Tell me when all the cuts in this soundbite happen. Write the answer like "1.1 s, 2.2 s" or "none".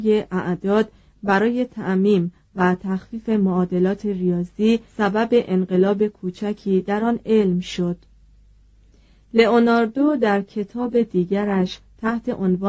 4.9 s